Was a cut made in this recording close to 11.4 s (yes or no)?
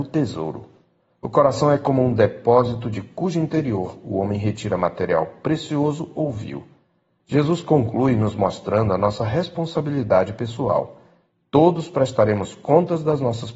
no